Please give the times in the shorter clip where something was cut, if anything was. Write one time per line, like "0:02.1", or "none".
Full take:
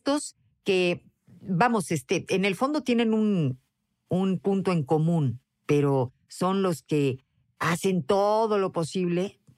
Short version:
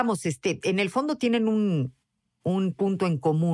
none